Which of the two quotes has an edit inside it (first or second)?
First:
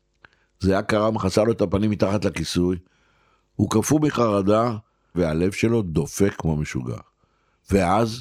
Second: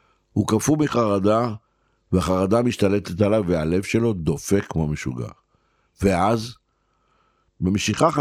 first